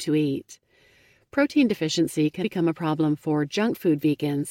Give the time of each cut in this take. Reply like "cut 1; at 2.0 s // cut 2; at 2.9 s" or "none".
cut 1; at 2.4 s